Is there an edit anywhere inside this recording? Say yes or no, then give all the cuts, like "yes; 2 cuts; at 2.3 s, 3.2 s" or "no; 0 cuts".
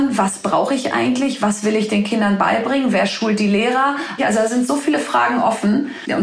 yes; 1 cut; at 4.2 s